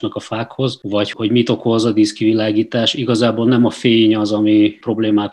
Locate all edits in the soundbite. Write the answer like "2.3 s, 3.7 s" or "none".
1.1 s